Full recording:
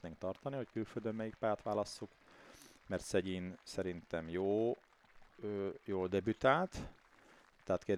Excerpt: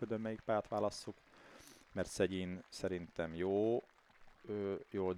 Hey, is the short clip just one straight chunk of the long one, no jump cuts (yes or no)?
yes